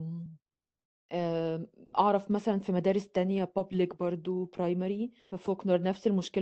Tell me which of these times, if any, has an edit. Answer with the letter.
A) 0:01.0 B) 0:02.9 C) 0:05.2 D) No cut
C